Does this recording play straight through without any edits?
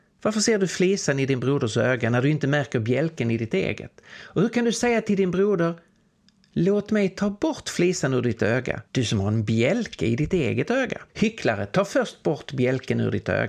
no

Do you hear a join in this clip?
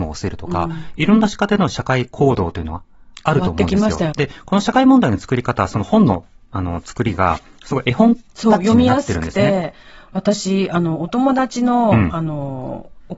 yes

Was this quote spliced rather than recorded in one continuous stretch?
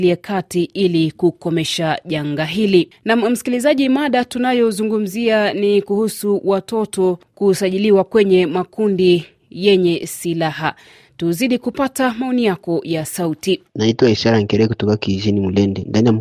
no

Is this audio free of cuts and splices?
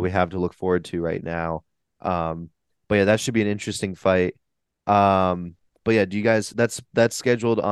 yes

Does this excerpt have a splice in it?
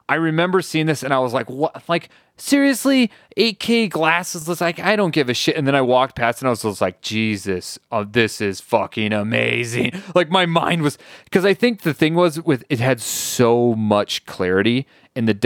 no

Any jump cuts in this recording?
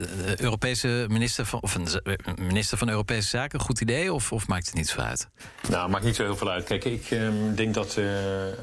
no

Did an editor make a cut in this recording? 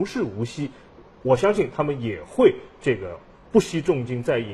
no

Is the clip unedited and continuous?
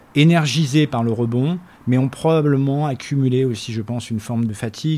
yes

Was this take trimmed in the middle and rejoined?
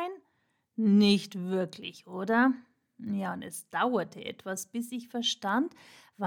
no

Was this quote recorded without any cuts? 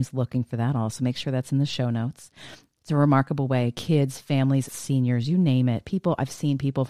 no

